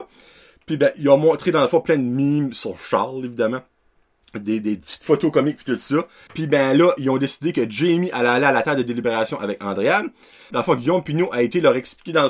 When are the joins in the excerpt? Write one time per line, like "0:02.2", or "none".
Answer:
0:06.3
0:10.5